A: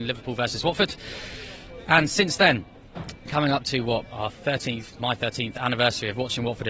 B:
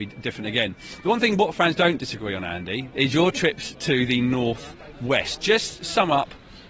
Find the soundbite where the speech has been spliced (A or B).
B